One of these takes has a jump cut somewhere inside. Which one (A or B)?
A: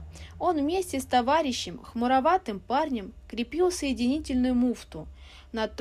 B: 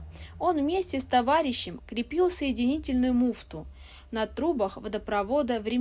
B